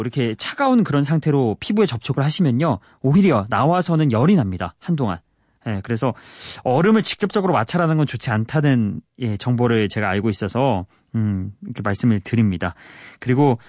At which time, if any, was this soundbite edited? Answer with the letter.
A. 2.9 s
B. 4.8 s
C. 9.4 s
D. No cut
D